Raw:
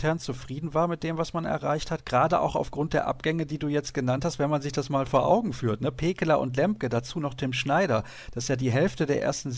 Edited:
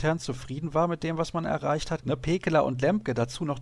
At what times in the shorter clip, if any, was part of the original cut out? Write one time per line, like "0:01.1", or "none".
0:02.0